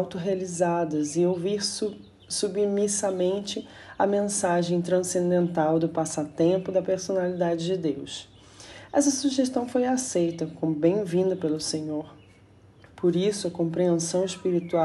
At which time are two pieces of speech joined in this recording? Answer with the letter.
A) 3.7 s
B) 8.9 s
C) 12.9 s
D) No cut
C